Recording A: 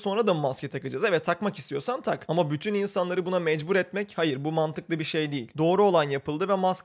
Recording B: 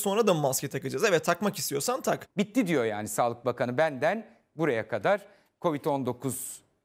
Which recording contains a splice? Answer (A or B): B